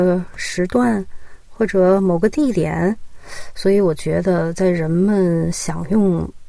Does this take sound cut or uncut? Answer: uncut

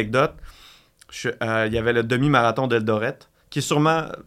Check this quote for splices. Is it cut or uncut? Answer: uncut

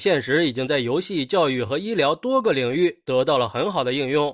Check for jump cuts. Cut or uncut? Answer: uncut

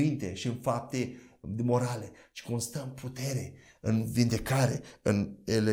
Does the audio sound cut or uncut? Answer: uncut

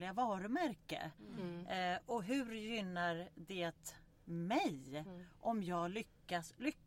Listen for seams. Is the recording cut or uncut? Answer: uncut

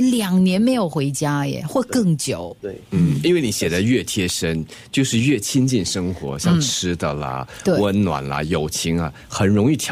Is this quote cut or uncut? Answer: uncut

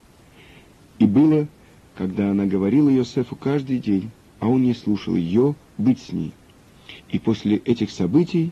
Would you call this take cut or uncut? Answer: cut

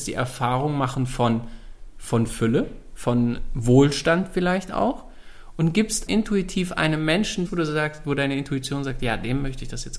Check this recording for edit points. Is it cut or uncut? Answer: cut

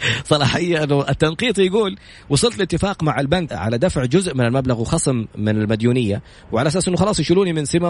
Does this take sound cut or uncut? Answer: cut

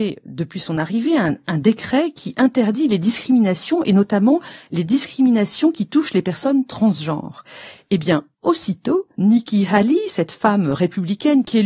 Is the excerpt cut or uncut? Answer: uncut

